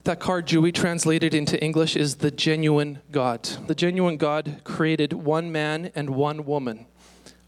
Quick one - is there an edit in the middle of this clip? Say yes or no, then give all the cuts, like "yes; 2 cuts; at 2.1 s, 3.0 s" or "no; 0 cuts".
yes; 1 cut; at 3.7 s